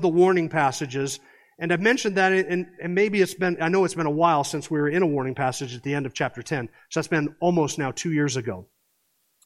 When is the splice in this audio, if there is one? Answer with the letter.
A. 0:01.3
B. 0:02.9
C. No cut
C